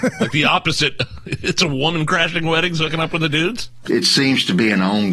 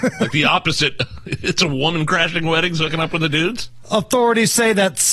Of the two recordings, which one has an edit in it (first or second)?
first